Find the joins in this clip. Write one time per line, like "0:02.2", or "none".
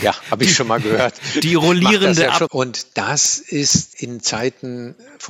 0:02.5
0:03.9